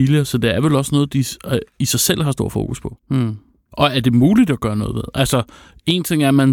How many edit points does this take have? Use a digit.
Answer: 1